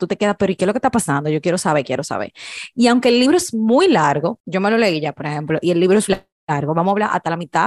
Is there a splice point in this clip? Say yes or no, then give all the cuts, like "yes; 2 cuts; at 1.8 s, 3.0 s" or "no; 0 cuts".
yes; 2 cuts; at 4.4 s, 6.1 s